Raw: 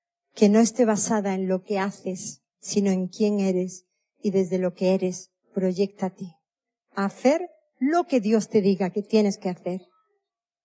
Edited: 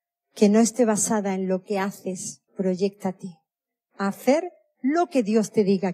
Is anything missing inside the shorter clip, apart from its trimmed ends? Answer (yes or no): yes